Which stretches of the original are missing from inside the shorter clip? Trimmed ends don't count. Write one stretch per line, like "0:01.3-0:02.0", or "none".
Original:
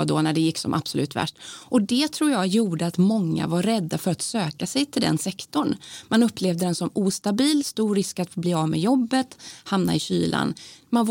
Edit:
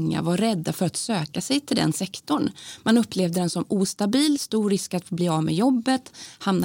none